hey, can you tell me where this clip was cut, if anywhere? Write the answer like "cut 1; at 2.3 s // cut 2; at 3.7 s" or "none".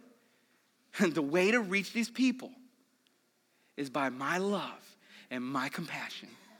none